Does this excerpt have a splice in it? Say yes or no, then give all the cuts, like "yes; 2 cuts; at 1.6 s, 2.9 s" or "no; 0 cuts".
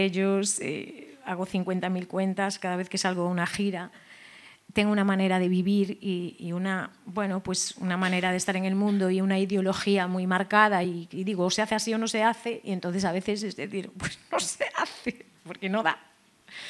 no; 0 cuts